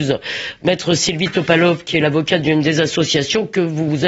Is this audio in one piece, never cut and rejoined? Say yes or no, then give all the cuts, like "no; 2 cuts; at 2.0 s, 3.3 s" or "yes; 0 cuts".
yes; 0 cuts